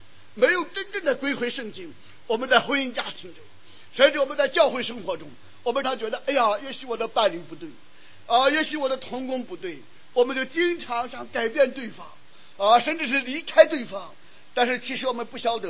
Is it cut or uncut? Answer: cut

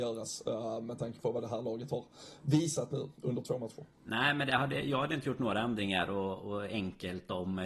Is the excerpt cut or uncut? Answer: uncut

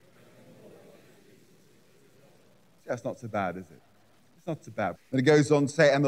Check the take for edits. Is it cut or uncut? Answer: cut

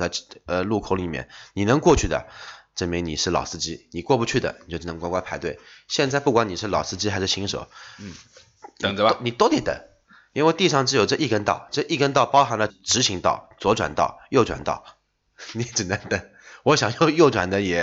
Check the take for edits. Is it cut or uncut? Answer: cut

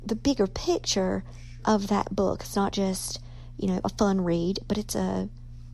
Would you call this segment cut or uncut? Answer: uncut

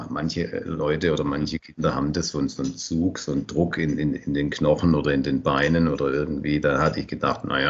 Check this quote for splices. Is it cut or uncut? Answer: uncut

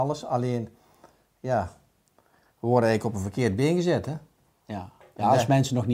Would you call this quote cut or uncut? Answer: uncut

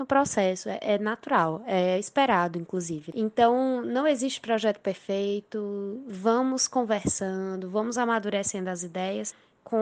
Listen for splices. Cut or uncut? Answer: uncut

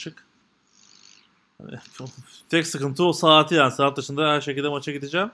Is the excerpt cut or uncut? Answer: uncut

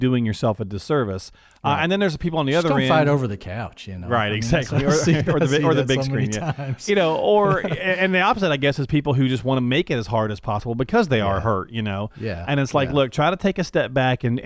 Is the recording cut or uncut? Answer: uncut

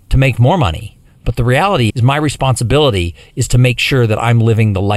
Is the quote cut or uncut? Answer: cut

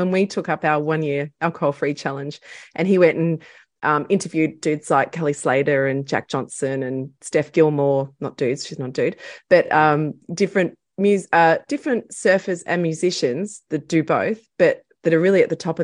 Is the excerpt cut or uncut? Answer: uncut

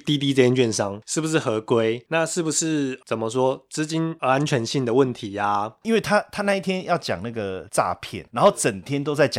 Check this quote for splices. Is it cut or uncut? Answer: cut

